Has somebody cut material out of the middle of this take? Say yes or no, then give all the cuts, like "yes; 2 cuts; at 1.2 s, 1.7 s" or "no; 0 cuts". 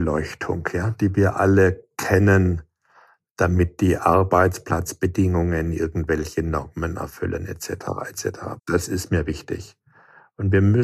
yes; 1 cut; at 8.6 s